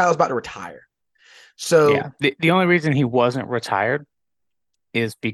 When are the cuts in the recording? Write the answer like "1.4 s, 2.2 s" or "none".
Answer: none

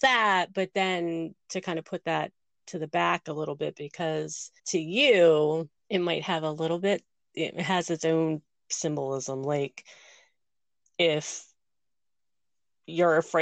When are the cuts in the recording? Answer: 4.6 s, 5.8 s

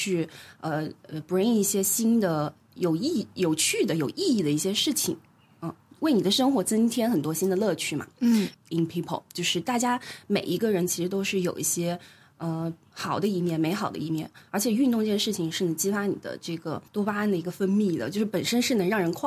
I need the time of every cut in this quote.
8.5 s, 16.9 s

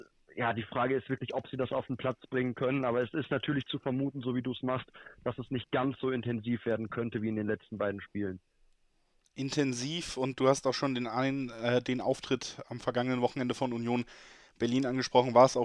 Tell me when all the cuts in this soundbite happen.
none

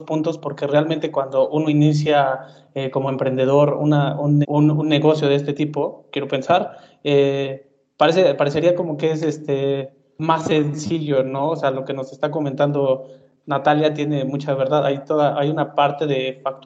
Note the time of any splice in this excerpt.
4.4 s

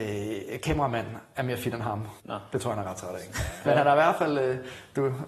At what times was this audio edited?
2.2 s, 3.7 s

